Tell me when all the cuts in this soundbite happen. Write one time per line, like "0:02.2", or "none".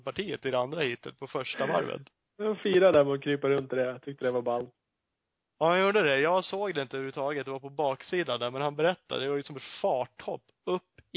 none